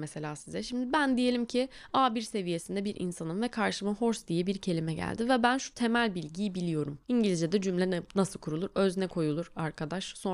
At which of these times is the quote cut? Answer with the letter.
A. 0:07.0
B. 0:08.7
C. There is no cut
A